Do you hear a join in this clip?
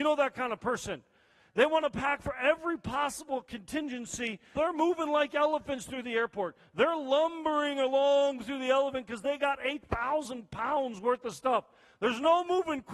yes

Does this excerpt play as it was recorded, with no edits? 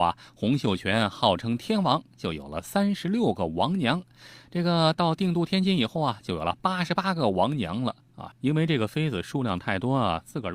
no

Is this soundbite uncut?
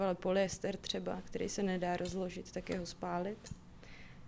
yes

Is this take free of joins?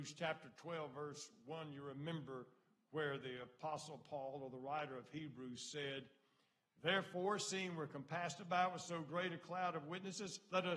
yes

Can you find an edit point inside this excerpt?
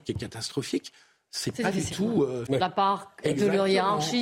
yes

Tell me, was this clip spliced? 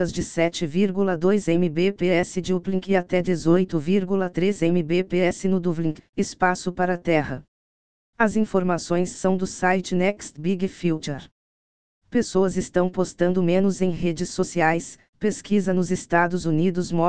no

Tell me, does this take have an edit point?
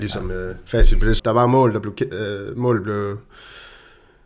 yes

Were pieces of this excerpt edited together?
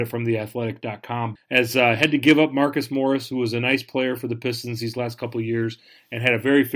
yes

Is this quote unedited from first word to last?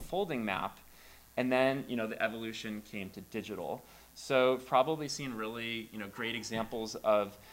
yes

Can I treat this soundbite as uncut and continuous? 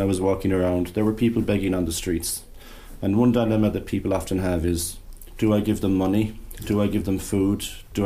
yes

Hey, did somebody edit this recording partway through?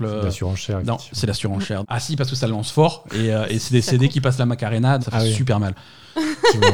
yes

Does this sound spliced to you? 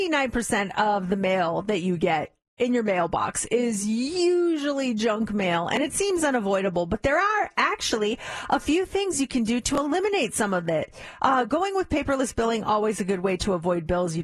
no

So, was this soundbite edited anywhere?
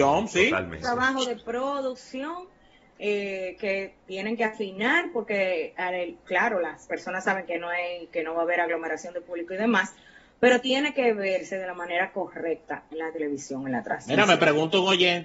no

